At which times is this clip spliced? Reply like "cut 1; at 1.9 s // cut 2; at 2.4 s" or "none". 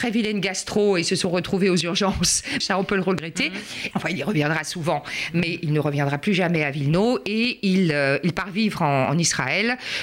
cut 1; at 2.6 s // cut 2; at 3.9 s